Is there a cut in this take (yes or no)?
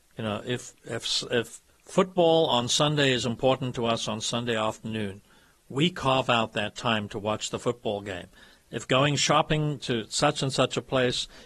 no